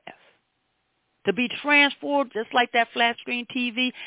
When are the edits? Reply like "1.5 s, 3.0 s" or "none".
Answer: 1.2 s, 2.3 s

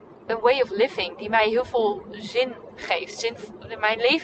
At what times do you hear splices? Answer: none

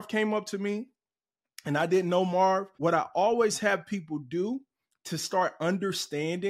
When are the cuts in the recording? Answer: 2.7 s

